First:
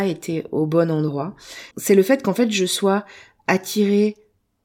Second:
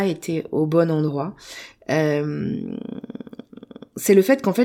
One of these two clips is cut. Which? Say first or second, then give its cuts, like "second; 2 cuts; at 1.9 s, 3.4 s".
first; 1 cut; at 1.7 s